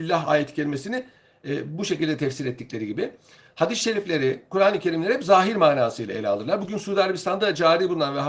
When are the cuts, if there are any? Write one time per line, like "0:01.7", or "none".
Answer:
none